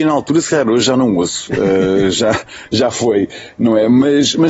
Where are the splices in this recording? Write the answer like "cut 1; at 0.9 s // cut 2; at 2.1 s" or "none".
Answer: none